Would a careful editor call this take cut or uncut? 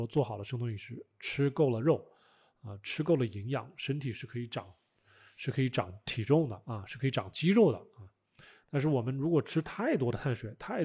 uncut